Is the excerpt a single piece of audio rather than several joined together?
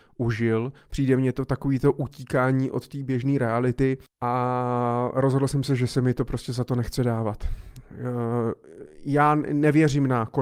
no; 1 cut; at 4.1 s

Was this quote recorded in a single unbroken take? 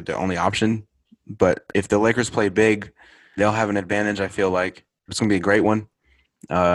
no; 2 cuts; at 3.4 s, 5.1 s

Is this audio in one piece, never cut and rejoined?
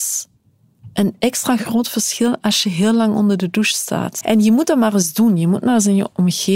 no; 1 cut; at 4.2 s

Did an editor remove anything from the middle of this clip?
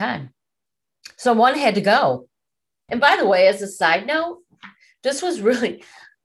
yes; 1 cut; at 2.9 s

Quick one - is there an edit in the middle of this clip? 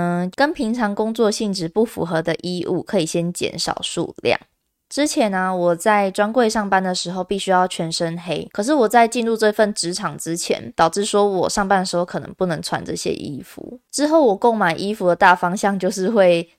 yes; 1 cut; at 10.7 s

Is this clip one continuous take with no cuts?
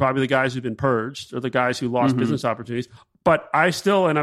yes; 0 cuts

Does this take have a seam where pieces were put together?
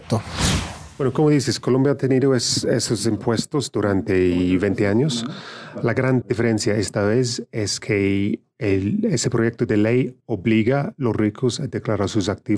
no; 0 cuts

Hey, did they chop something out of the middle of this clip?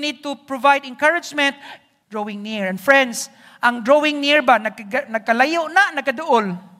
yes; 1 cut; at 2.0 s

